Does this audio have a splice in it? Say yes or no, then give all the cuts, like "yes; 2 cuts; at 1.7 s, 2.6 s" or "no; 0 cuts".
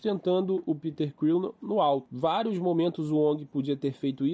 no; 0 cuts